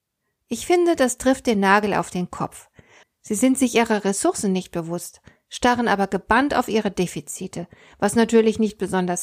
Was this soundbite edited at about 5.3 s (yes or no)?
no